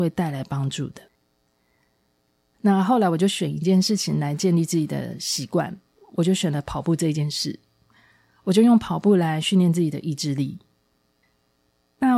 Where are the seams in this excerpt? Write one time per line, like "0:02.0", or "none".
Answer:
none